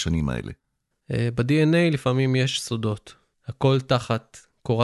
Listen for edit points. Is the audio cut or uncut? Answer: cut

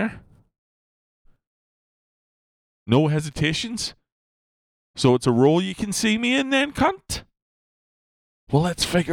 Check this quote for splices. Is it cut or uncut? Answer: uncut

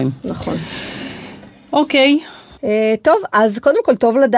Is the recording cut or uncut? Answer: uncut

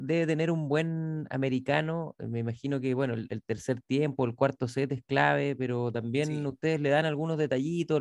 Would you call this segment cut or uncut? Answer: uncut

